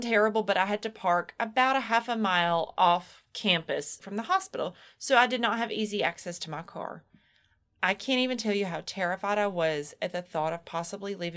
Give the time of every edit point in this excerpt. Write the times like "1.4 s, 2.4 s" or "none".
4.0 s